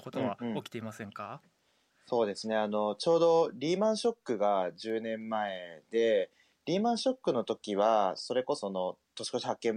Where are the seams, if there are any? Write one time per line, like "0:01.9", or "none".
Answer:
0:08.6